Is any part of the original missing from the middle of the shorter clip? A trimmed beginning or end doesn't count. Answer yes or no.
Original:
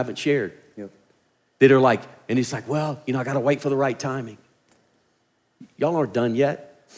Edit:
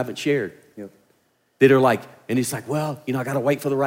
no